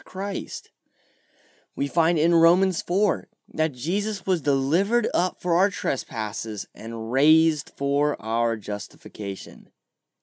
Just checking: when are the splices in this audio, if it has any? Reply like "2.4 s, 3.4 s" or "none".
none